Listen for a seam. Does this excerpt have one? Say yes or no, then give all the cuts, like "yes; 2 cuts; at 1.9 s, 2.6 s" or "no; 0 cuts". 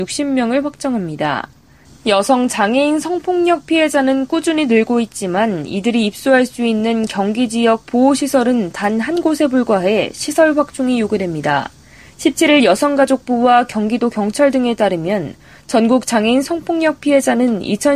yes; 2 cuts; at 1.8 s, 12.0 s